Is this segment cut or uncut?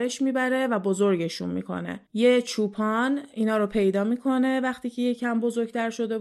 uncut